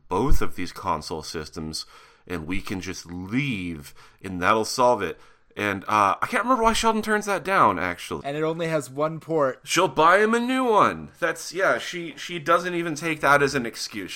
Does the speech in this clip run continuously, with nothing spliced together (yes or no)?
no